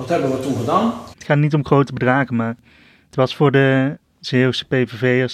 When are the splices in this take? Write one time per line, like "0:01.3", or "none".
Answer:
0:01.1